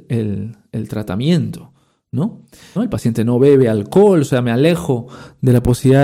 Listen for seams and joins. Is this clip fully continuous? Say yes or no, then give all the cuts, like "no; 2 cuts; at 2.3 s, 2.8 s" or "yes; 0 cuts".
no; 1 cut; at 2.8 s